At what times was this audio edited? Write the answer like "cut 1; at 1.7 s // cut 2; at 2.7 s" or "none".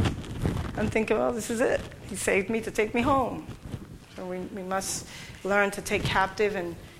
cut 1; at 4.0 s